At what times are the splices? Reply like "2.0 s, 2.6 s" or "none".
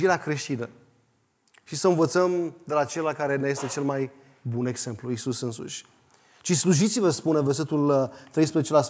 none

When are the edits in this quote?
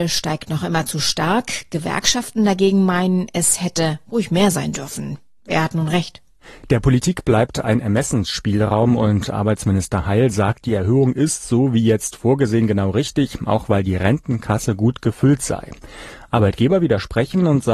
none

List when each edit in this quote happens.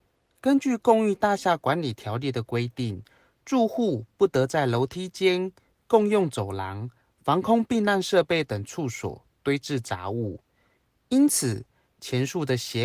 none

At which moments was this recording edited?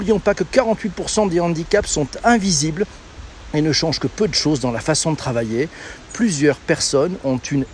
none

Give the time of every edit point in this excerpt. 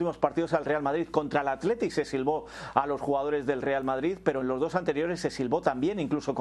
none

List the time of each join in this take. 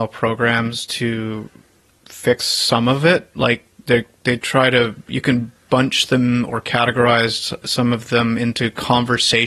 none

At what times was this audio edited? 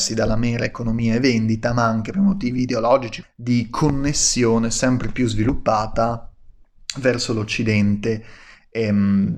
2.1 s, 3.2 s

